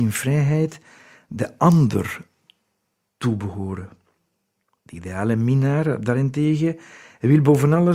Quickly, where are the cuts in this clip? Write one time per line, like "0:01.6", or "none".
0:04.8